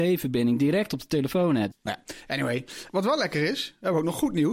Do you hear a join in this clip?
yes; 2 cuts; at 1.7 s, 2.9 s

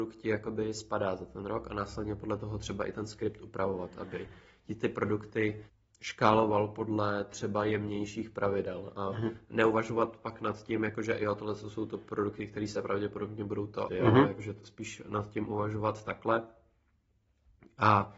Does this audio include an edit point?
yes; 1 cut; at 13.9 s

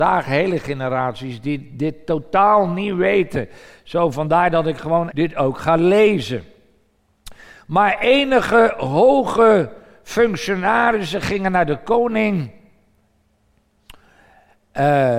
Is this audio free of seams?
no; 1 cut; at 5.1 s

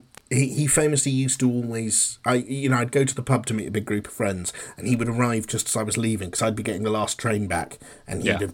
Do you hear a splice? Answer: no; 0 cuts

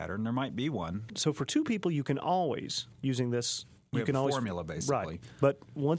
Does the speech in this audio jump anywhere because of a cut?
yes; 1 cut; at 1.1 s

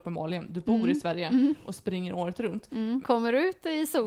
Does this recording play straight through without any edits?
no; 1 cut; at 3.0 s

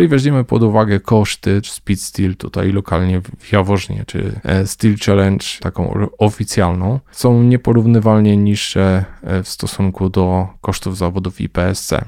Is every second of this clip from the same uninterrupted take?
no; 2 cuts; at 1.6 s, 5.6 s

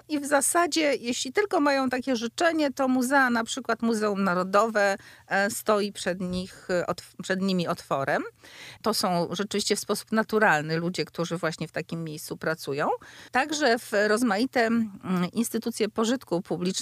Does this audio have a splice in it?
yes; 1 cut; at 8.8 s

